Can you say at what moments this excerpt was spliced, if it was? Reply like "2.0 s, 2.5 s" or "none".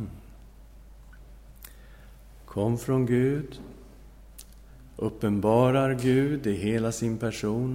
4.9 s